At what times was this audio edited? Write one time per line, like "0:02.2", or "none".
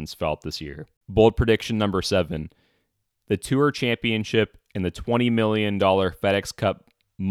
0:01.0